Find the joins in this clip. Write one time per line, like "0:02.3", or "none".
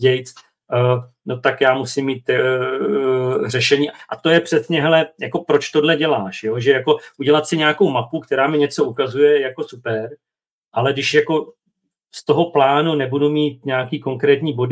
none